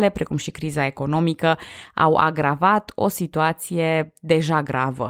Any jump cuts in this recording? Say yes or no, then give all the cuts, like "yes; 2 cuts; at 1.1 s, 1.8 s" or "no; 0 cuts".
no; 0 cuts